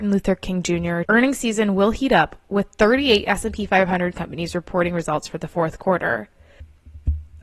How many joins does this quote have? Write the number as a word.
one